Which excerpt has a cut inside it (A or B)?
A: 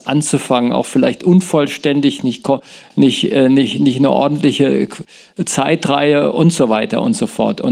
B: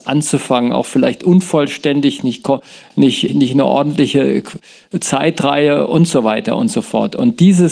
B